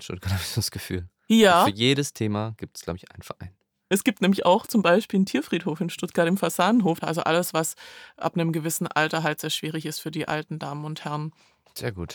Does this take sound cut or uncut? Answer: cut